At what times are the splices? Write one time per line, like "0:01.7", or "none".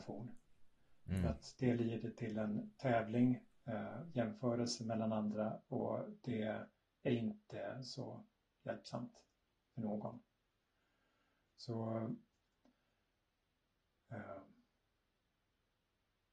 none